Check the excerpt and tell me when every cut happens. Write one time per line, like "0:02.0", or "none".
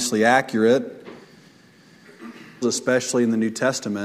0:02.6